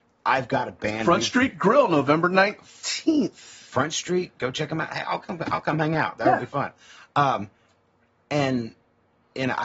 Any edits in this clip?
no; 0 cuts

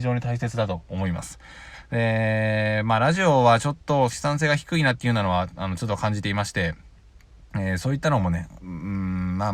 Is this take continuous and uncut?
no; 2 cuts; at 4.1 s, 8.6 s

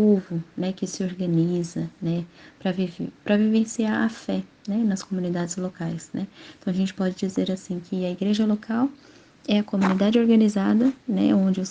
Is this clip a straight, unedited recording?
yes; 0 cuts

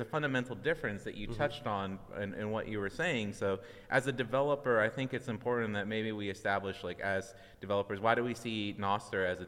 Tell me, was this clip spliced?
no; 0 cuts

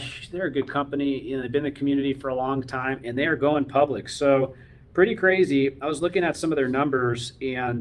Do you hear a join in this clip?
no; 0 cuts

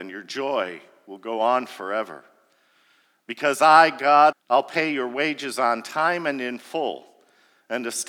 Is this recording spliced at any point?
yes; 1 cut; at 4.3 s

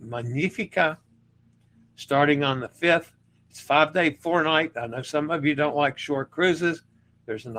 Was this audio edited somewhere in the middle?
no; 0 cuts

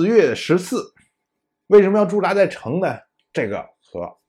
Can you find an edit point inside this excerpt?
yes; 1 cut; at 1.7 s

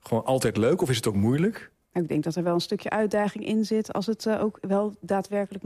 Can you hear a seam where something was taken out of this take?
yes; 1 cut; at 1.8 s

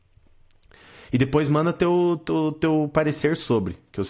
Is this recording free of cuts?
yes; 0 cuts

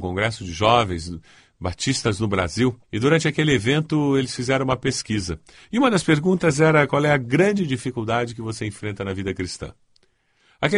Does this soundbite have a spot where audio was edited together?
yes; 1 cut; at 2.8 s

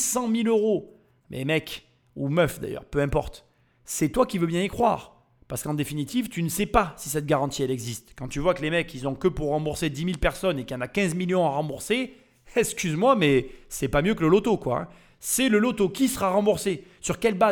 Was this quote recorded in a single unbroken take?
yes; 0 cuts

